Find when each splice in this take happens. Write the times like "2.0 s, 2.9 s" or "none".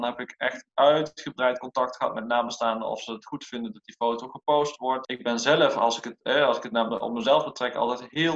5.0 s

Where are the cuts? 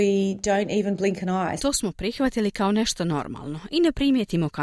1.6 s

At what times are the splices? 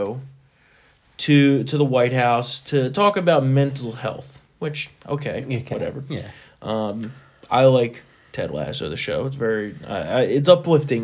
none

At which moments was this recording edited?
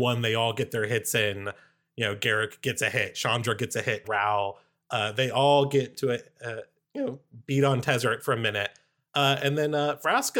4.0 s

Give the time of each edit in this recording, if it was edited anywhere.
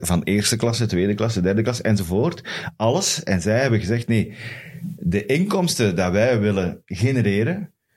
none

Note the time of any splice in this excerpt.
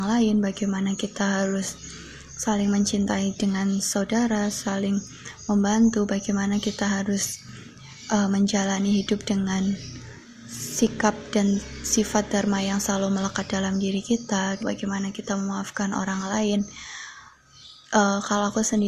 14.6 s

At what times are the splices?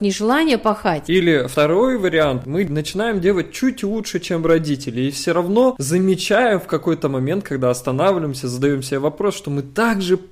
none

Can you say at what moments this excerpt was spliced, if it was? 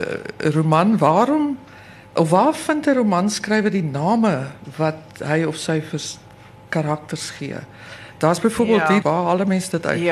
9.0 s

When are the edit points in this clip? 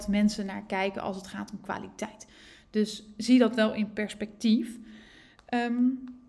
none

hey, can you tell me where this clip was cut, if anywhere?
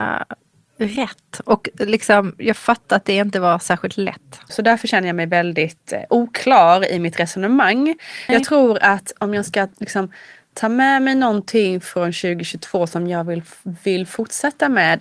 4.5 s, 8.3 s

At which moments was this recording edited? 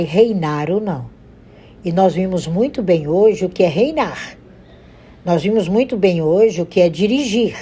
none

